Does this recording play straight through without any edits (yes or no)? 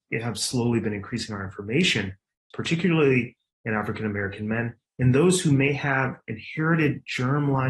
no